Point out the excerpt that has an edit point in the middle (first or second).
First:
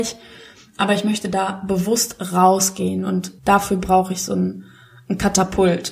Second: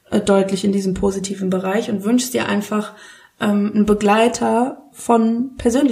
first